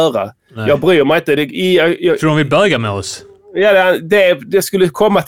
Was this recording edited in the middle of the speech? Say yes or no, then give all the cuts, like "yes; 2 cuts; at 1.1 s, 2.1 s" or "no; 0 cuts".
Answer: no; 0 cuts